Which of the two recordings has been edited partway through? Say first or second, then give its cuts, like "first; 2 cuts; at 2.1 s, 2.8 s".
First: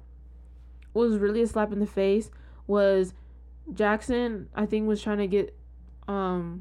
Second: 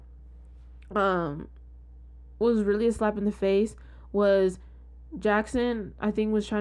first; 1 cut; at 0.9 s